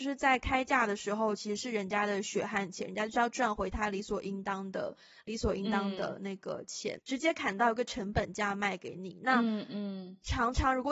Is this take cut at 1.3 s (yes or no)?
no